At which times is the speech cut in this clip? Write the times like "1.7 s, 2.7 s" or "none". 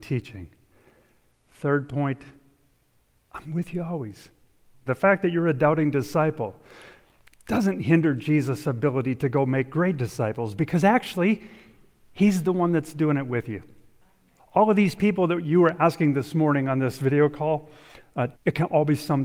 4.9 s, 14.4 s, 18.3 s